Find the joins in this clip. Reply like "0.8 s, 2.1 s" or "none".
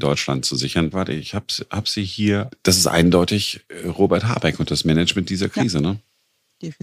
0.9 s, 2.5 s